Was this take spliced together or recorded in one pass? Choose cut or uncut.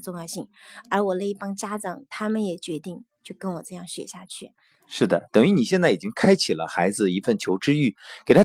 cut